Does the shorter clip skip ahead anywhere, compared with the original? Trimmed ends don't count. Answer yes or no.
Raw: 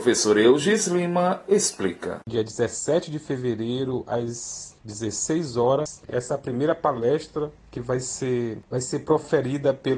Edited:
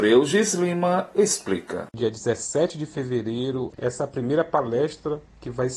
yes